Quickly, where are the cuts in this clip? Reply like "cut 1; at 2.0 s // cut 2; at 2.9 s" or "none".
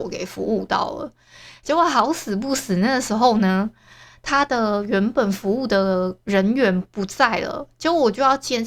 cut 1; at 6.2 s